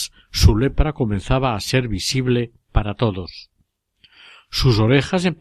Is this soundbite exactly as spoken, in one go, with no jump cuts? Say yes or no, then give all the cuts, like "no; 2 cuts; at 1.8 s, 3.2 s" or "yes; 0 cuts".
yes; 0 cuts